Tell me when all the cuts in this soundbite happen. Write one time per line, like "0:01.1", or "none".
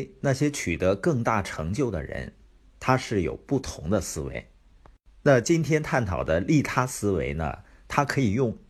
none